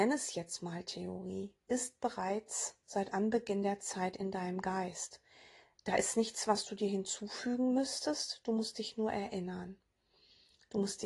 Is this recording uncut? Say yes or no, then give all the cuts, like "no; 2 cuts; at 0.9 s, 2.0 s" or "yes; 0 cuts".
yes; 0 cuts